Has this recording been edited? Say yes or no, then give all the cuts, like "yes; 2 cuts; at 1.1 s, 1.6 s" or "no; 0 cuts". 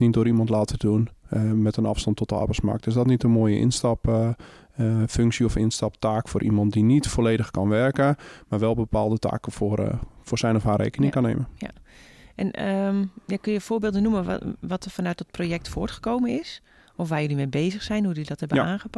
no; 0 cuts